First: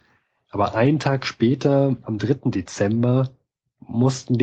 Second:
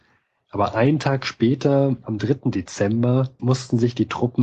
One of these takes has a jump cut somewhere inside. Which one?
second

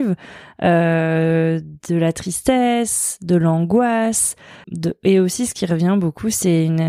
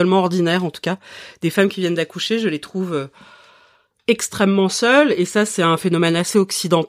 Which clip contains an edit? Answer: first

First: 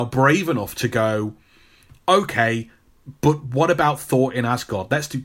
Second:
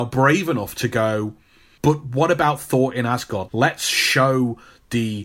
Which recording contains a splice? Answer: second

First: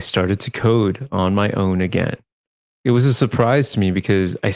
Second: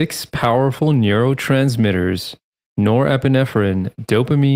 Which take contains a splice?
first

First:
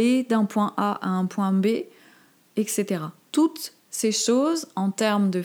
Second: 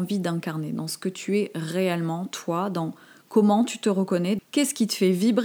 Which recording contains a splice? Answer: second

